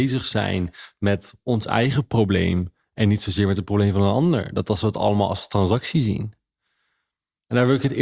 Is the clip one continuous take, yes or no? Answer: yes